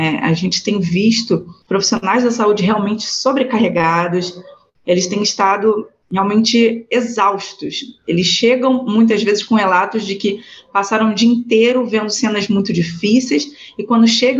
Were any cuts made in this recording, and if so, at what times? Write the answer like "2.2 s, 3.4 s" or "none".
none